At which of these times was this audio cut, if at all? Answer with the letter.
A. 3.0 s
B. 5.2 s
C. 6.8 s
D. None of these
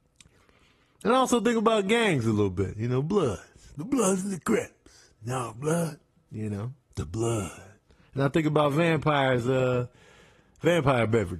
C